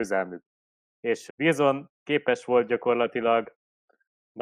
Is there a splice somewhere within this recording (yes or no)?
yes